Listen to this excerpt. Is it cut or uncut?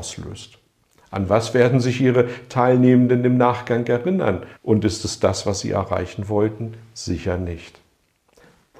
cut